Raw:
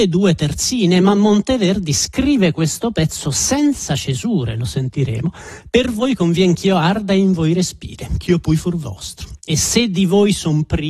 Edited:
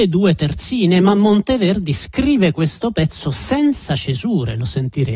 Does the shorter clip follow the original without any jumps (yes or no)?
yes